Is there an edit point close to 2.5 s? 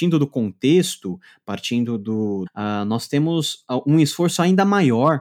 yes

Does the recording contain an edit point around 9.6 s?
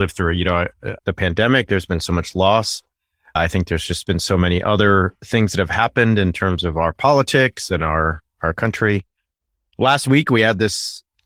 no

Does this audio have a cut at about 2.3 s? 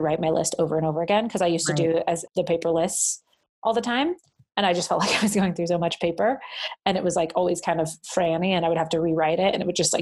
yes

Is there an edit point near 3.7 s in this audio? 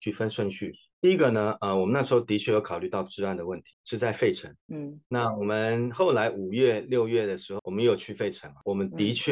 yes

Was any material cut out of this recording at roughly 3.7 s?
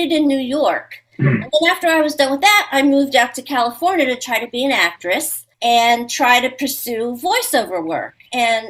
no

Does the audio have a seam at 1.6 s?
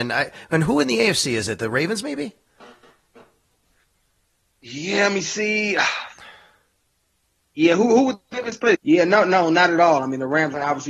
no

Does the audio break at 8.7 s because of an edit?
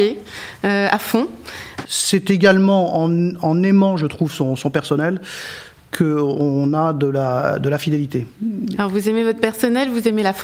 yes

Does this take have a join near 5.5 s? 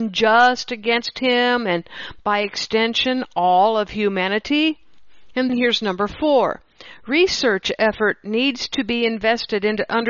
yes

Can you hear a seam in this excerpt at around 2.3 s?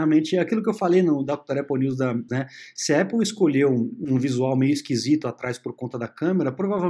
yes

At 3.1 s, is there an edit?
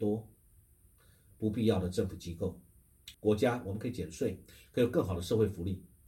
yes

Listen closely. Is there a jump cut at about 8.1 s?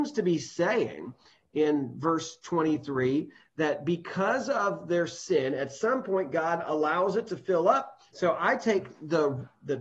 yes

